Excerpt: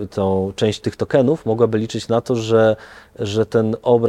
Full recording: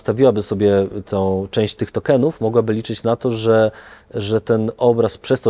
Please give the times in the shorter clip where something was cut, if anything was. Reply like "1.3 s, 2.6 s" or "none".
none